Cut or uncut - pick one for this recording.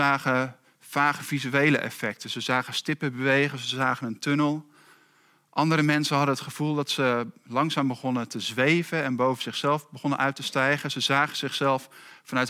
uncut